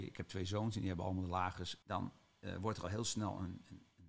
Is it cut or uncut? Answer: cut